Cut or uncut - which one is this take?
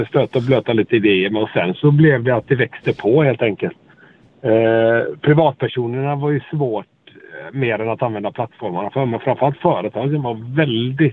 uncut